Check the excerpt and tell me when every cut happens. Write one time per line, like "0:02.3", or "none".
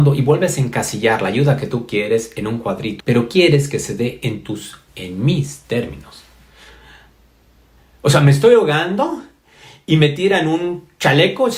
0:03.0
0:04.9